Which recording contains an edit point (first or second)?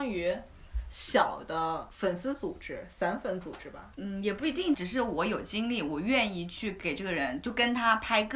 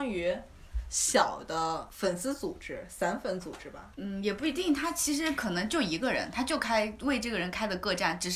first